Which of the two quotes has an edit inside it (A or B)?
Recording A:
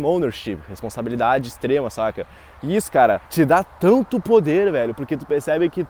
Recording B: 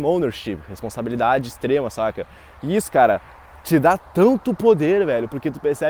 A